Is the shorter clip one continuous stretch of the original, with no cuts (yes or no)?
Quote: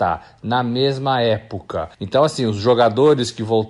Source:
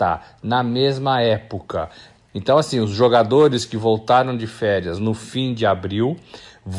no